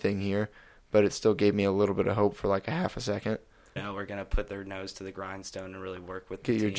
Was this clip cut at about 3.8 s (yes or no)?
yes